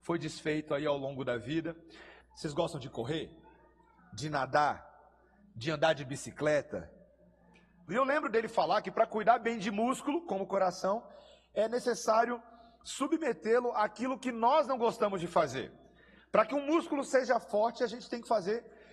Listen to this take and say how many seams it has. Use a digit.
2